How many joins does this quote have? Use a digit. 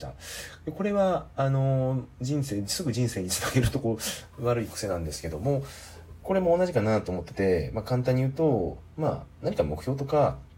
0